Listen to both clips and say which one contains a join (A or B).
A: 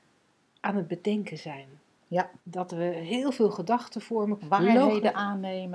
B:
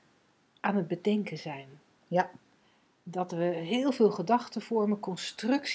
A